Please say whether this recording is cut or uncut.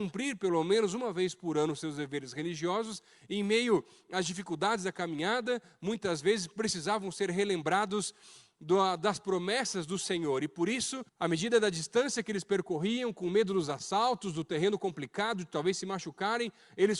cut